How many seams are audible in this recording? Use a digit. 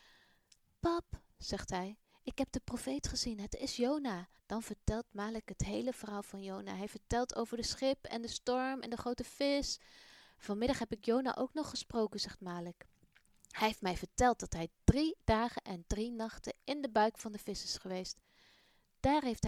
1